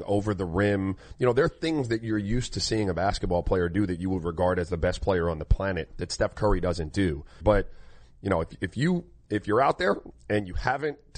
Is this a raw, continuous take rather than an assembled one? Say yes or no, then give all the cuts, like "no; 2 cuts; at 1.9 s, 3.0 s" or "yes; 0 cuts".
no; 1 cut; at 7.4 s